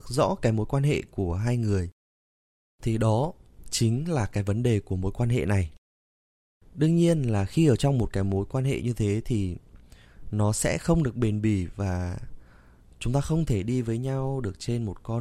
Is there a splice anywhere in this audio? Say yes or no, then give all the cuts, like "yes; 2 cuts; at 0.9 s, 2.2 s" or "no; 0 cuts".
no; 0 cuts